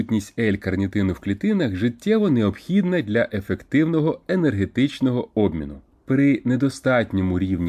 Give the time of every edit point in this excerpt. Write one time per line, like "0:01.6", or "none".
0:05.9